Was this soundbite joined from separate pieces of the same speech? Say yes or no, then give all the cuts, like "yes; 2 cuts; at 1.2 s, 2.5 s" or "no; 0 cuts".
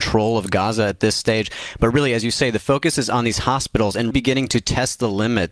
yes; 1 cut; at 4.1 s